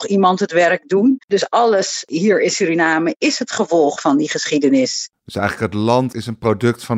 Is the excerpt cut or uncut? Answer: cut